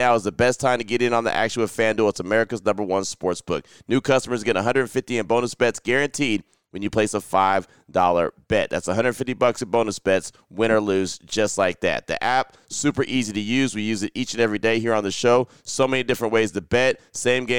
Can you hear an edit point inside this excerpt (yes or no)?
no